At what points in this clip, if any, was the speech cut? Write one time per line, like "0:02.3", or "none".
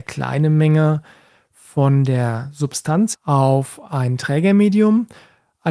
0:03.1